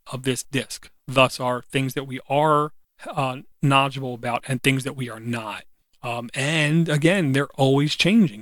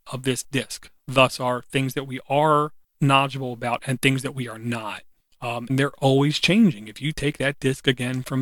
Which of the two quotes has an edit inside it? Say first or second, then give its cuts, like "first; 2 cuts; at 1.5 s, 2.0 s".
second; 2 cuts; at 2.9 s, 5.7 s